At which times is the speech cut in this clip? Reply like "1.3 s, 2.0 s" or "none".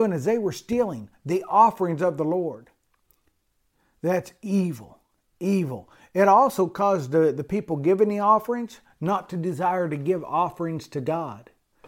none